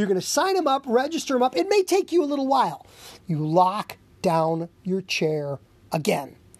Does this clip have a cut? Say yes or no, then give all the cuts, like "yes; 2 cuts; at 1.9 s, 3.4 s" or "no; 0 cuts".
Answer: yes; 1 cut; at 3.2 s